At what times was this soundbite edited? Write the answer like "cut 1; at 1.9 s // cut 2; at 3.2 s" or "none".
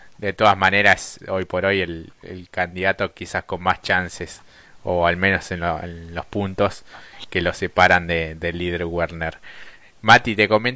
cut 1; at 1.2 s